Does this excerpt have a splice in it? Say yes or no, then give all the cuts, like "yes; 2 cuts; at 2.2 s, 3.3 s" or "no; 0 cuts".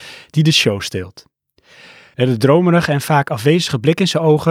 yes; 1 cut; at 2.1 s